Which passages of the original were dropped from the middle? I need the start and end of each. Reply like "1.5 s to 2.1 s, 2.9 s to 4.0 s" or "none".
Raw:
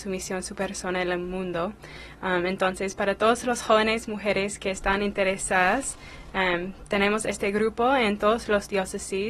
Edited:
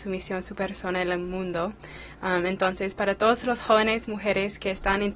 none